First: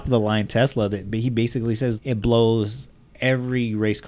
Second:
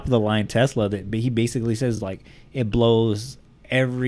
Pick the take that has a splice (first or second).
first